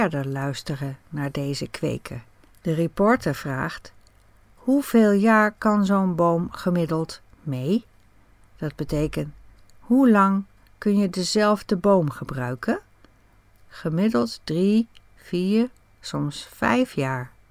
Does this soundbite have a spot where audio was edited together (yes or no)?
yes